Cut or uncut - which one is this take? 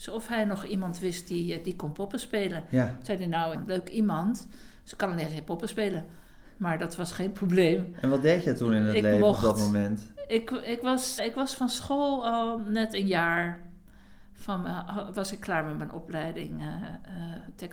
cut